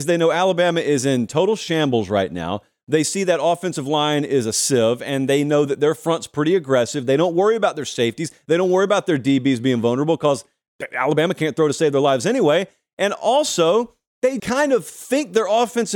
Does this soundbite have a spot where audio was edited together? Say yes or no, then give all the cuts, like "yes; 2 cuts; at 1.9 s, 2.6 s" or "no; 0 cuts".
yes; 1 cut; at 14.4 s